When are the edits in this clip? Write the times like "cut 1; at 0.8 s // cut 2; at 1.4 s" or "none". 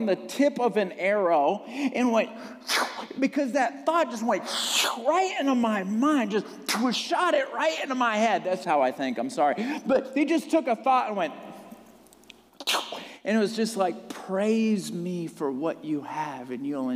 cut 1; at 8.6 s